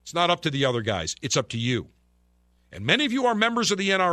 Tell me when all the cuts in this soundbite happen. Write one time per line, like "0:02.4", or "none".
none